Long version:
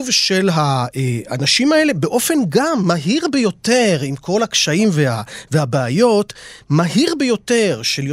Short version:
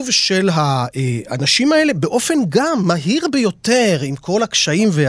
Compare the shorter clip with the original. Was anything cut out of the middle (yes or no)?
no